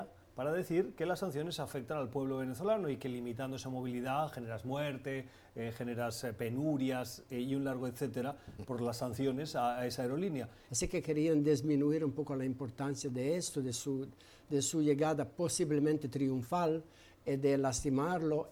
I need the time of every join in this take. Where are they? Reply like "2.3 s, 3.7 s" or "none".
10.7 s